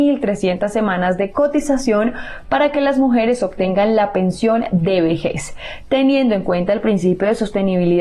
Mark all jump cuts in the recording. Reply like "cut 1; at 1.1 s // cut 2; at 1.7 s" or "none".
none